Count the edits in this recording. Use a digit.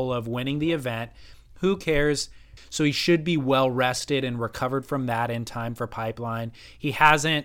1